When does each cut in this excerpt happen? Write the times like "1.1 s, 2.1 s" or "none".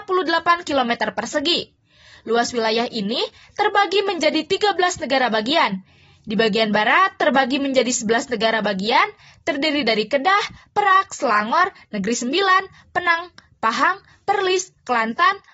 none